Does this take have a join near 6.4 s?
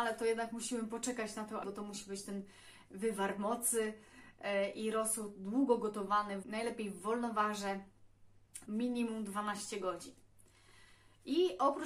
yes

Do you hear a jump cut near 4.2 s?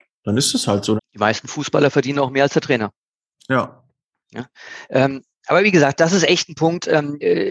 no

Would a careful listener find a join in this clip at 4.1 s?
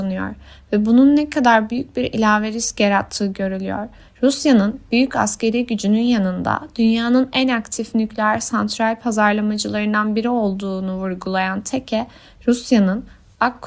yes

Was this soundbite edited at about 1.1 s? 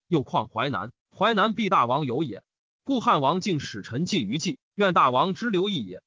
no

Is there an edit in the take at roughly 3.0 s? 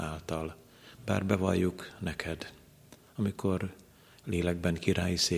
no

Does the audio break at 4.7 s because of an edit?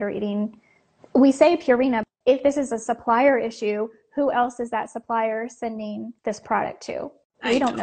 no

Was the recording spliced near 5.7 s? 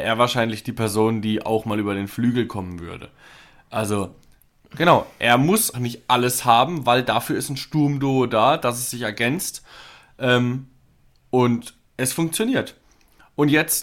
yes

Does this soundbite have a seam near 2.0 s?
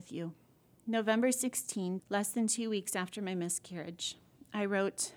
yes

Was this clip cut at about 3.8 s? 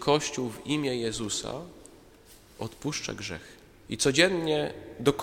yes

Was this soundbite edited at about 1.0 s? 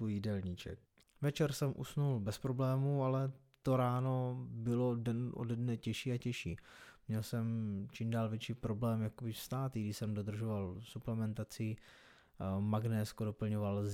yes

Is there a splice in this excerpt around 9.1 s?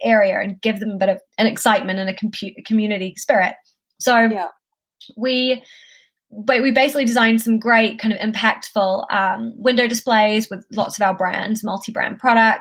no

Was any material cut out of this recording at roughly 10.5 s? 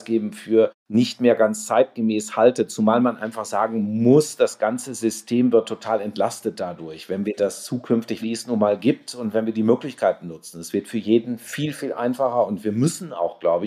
no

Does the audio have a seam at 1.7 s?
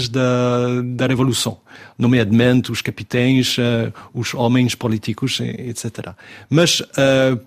no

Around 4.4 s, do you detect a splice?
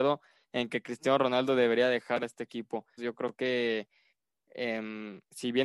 no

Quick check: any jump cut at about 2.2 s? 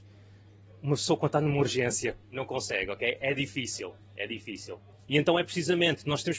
yes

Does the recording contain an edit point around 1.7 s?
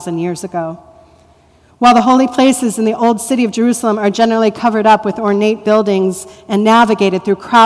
no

